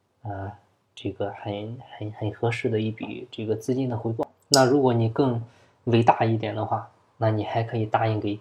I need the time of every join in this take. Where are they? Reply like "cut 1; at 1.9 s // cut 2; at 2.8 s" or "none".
none

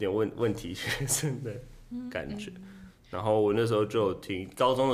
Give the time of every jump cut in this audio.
none

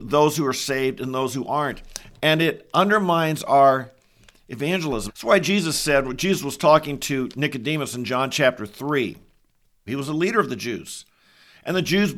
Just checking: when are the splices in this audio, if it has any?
cut 1; at 5.1 s // cut 2; at 9.9 s

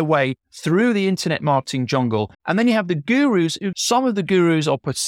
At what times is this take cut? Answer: cut 1; at 2.3 s // cut 2; at 3.7 s

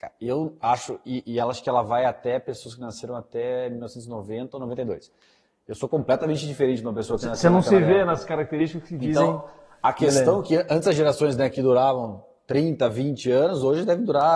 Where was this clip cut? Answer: none

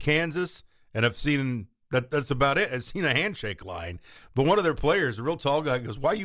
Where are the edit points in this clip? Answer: none

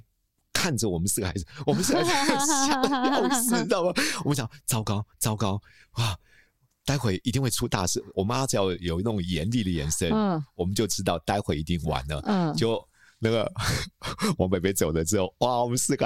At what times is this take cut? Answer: none

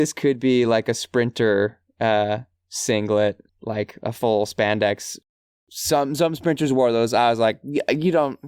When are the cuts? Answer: cut 1; at 3.5 s

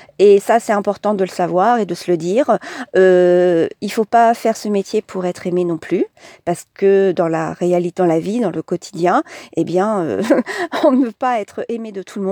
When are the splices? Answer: none

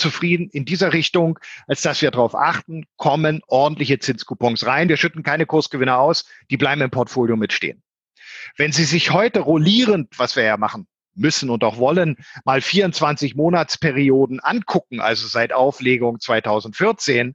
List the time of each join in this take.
none

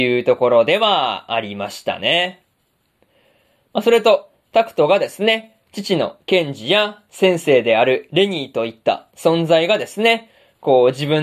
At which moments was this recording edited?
none

